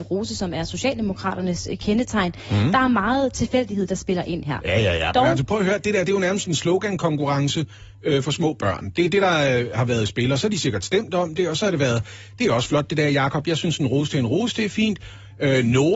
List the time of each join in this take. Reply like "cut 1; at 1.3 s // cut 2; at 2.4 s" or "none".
none